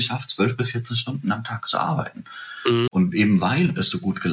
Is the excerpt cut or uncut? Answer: cut